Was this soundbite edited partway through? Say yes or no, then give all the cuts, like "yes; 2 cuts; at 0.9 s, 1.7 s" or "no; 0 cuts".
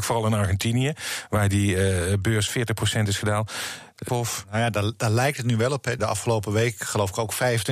yes; 2 cuts; at 4.1 s, 6.0 s